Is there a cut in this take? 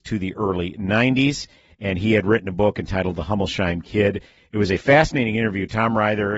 no; 0 cuts

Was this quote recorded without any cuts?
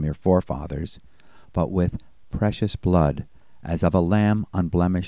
yes; 0 cuts

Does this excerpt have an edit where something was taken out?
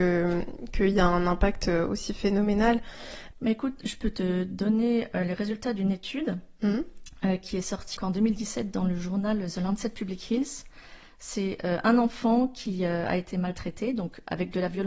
yes; 2 cuts; at 3.3 s, 8.0 s

